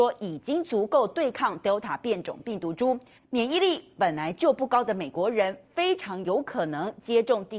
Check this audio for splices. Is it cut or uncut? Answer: cut